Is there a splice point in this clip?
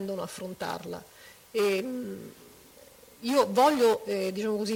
no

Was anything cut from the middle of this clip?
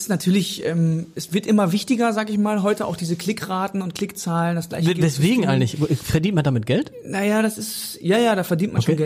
no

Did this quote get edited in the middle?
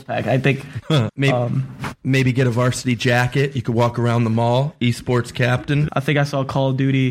yes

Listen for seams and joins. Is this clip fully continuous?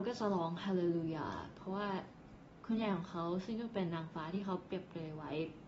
no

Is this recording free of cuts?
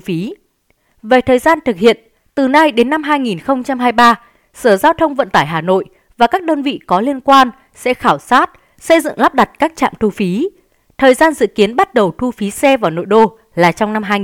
yes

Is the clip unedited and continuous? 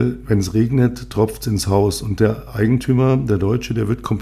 yes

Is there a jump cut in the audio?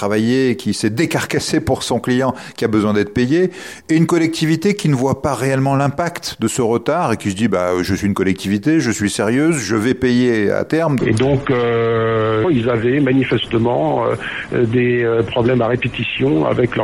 yes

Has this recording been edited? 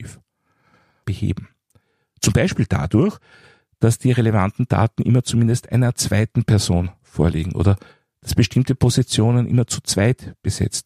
yes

